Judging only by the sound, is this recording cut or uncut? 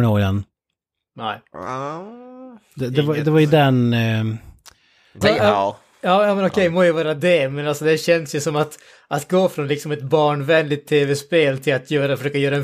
cut